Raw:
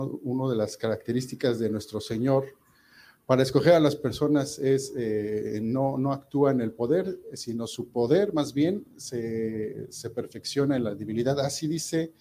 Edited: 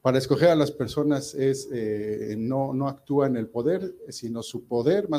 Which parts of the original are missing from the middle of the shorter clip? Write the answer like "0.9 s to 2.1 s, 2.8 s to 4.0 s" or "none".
none